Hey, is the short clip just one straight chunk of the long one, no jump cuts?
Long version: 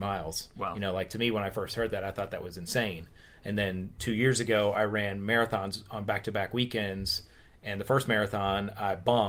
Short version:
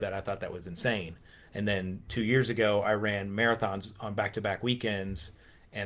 yes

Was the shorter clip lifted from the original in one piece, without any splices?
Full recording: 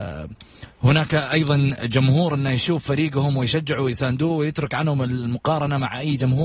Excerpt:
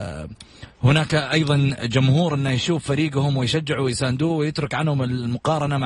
yes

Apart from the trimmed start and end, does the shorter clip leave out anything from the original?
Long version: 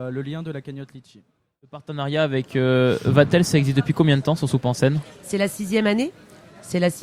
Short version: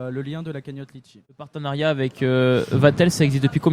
yes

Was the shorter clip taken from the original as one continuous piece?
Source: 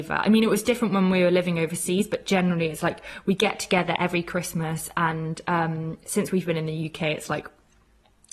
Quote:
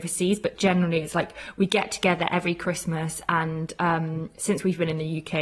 yes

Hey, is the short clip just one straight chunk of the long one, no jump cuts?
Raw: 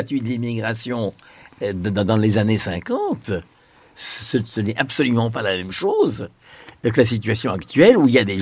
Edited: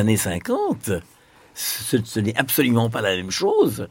yes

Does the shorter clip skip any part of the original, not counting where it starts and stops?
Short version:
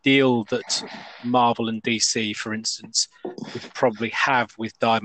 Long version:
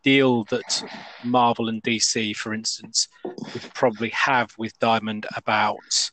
no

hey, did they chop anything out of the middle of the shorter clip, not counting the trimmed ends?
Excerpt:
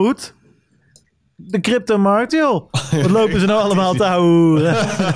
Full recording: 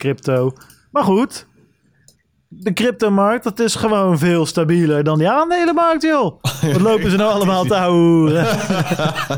yes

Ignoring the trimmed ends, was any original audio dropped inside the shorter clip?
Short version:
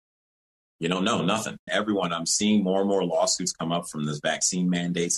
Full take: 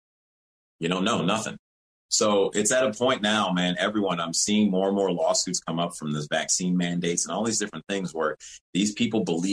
yes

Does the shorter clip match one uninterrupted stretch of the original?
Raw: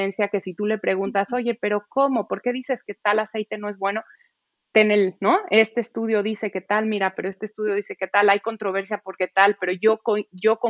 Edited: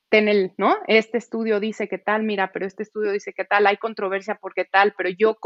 yes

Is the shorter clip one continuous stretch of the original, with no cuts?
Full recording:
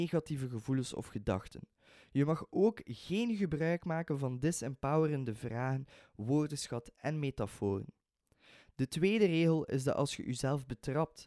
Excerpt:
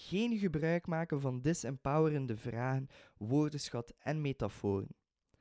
yes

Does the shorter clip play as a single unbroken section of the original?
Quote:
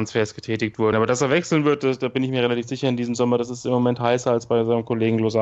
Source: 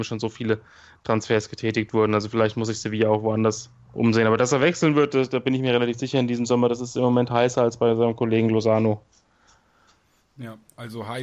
no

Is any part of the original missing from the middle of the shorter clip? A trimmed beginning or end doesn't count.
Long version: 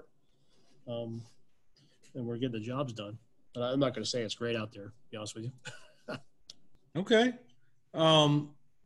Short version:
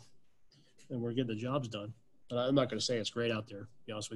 no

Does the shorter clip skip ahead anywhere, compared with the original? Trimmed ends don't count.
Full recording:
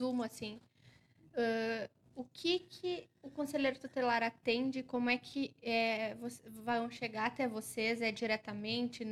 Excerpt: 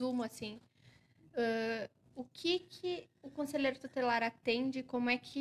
no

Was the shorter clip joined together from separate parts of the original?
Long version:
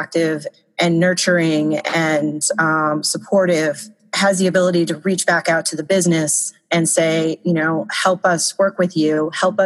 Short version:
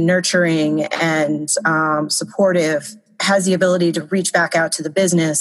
no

